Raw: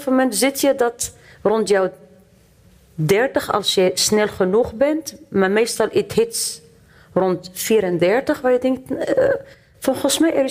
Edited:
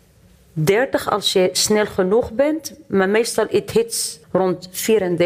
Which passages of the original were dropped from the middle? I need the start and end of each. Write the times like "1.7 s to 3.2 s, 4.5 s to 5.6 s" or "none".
6.7 s to 7.1 s